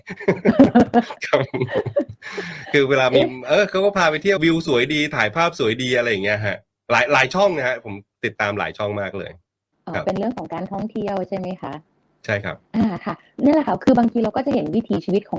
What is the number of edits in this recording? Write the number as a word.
two